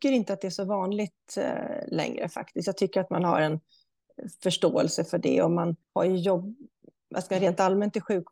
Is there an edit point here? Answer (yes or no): yes